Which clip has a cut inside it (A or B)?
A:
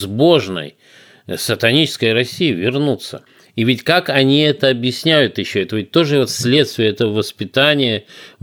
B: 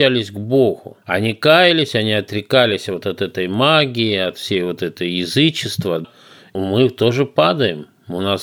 B